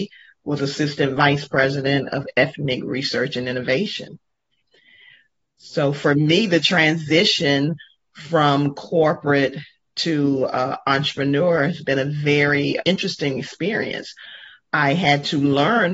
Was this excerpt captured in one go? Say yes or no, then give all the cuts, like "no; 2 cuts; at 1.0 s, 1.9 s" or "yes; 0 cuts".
no; 1 cut; at 12.8 s